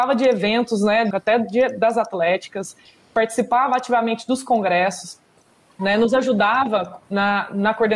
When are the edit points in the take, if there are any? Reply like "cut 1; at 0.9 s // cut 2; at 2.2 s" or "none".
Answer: cut 1; at 1.1 s